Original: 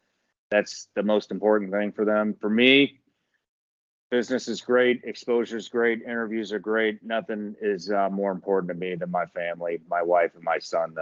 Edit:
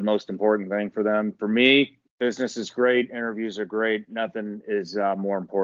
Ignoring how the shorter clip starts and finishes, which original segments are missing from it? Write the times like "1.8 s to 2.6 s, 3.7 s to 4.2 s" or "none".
3.1 s to 4.0 s, 5.0 s to 6.0 s

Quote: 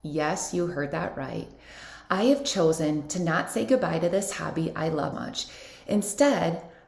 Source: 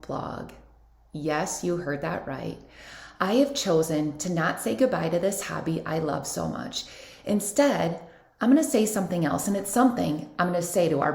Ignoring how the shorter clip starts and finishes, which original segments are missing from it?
6.2 s to 6.5 s

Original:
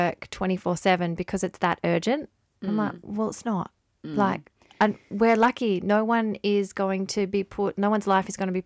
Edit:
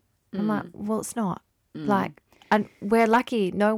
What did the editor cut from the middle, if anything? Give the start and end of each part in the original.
none

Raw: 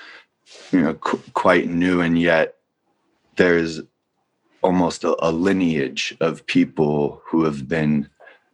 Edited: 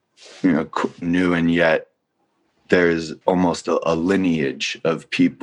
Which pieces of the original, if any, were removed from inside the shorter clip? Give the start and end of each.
1.3 s to 1.7 s, 3.9 s to 4.6 s

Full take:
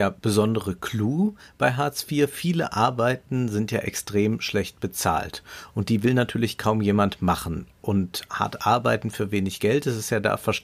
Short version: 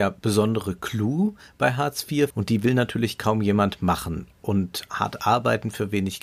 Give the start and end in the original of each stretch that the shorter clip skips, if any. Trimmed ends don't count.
2.3 s to 5.7 s

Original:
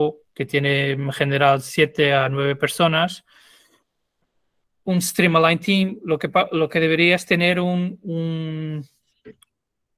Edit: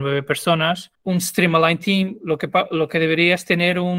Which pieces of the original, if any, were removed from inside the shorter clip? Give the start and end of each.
3.3 s to 4.7 s

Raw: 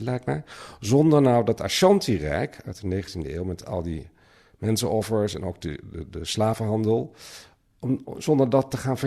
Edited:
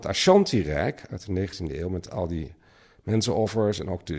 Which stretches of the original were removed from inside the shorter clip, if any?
none

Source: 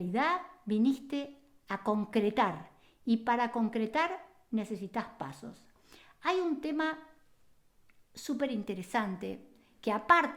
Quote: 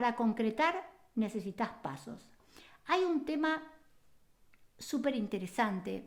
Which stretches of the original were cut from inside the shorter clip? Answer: none

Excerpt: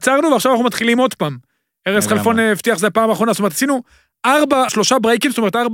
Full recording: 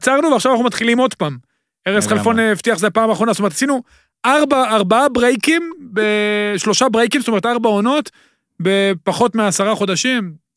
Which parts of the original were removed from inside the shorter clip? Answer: 4.7 s to 6.6 s

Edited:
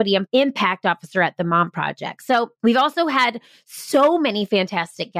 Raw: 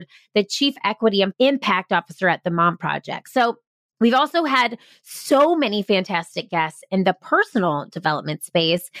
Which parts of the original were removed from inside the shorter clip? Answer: 3.6 s to 3.9 s

